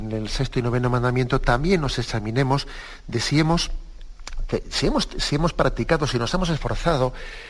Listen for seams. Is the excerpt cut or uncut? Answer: uncut